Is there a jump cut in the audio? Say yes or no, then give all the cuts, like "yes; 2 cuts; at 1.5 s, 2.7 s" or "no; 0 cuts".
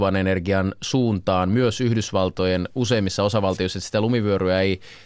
no; 0 cuts